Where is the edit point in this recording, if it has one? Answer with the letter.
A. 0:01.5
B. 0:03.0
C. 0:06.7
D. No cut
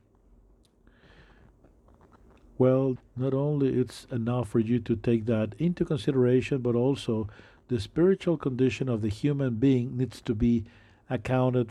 B